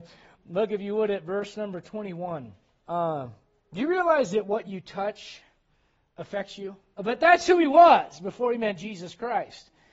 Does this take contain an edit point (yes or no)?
yes